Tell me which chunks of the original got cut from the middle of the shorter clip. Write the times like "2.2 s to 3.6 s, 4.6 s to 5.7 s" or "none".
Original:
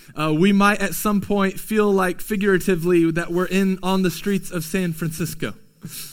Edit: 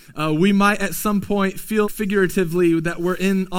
1.8 s to 2.2 s